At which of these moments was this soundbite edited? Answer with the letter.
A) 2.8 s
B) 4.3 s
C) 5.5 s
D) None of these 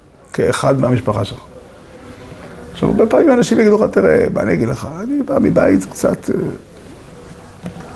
D